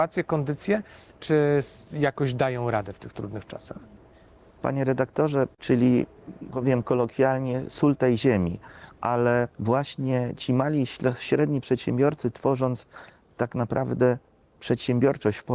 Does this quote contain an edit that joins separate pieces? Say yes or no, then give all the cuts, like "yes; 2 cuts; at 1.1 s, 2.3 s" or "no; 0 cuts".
yes; 3 cuts; at 1.2 s, 5.6 s, 9.5 s